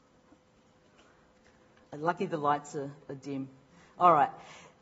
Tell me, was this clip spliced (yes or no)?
no